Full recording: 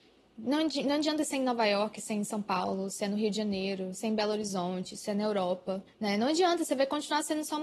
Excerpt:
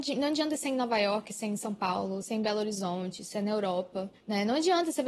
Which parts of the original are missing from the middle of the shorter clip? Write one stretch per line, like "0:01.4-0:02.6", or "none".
0:02.9-0:03.9